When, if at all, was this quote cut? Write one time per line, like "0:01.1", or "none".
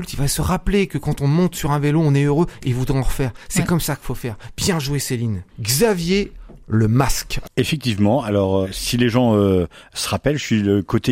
0:05.5
0:07.4
0:08.6